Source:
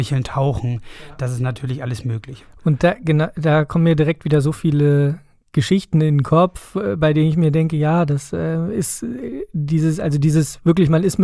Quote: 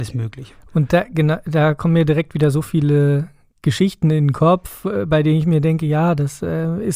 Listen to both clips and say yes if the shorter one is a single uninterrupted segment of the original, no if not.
yes